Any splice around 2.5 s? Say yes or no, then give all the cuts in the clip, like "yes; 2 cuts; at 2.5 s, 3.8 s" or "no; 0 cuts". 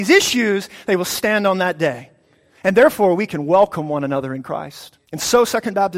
no; 1 cut; at 5.0 s